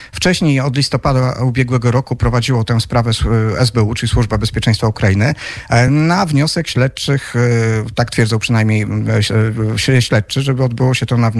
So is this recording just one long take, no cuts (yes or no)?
yes